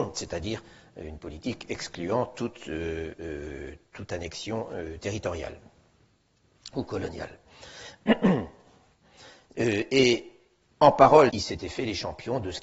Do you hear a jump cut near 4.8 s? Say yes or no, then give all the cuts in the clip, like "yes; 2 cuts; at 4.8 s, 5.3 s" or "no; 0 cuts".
no; 2 cuts; at 9.5 s, 11.3 s